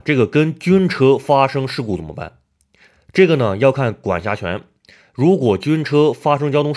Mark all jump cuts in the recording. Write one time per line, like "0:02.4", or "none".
none